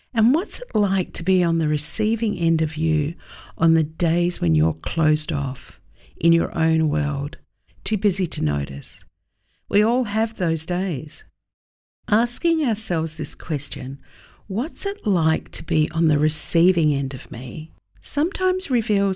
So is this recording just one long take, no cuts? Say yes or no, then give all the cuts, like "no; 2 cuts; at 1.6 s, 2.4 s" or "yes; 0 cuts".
no; 1 cut; at 7.7 s